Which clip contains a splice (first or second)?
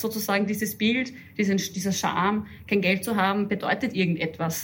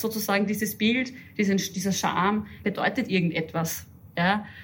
second